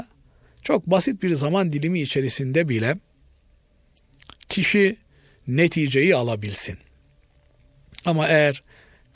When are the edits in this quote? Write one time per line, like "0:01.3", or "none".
none

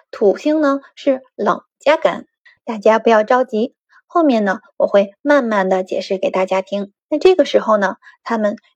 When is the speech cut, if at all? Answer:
0:02.6
0:07.0

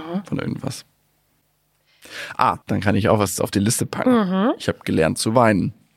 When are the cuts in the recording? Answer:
0:02.6

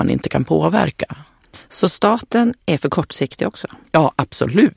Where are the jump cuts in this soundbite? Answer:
none

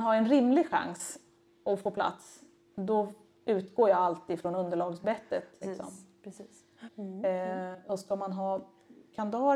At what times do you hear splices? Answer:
0:05.6
0:06.9

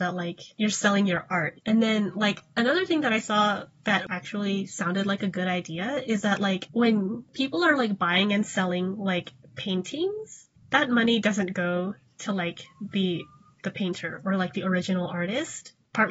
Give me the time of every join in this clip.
0:01.6

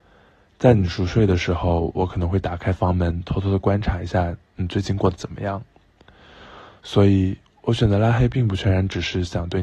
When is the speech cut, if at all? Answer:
none

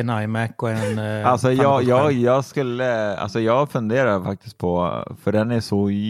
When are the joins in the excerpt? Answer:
none

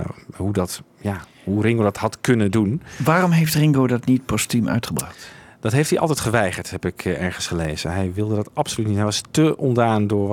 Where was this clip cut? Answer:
none

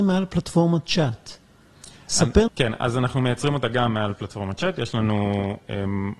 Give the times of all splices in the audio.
0:02.5

